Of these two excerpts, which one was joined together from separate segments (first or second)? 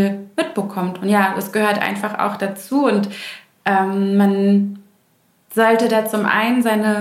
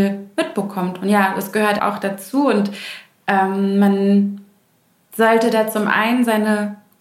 second